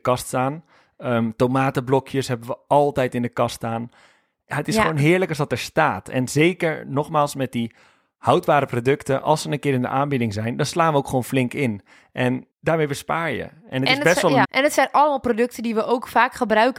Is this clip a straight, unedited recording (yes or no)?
no